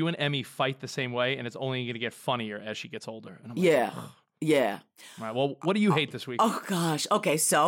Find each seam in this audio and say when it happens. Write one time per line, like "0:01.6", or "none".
none